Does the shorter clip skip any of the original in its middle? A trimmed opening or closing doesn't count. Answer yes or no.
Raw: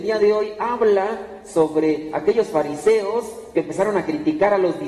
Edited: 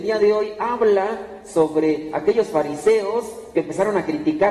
no